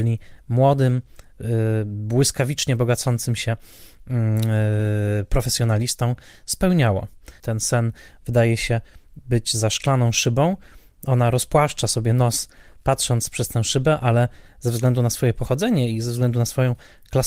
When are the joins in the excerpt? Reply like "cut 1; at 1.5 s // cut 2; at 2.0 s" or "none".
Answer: cut 1; at 7.4 s